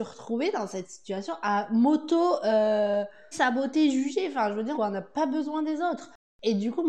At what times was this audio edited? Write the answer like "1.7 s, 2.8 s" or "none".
3.3 s, 4.7 s